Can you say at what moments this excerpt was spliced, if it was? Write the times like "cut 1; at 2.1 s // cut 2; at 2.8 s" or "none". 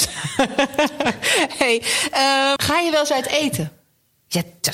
cut 1; at 2.6 s